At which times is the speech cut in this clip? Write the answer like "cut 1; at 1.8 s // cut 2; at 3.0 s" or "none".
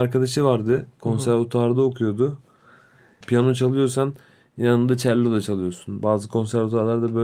cut 1; at 3.2 s

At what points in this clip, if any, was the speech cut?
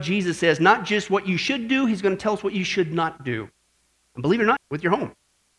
cut 1; at 4.6 s

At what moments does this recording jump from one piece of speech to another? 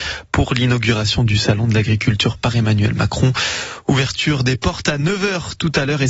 none

